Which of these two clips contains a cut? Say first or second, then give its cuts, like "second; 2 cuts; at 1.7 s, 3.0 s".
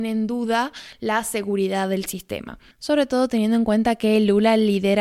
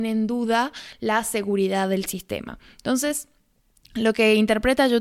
first; 1 cut; at 2.7 s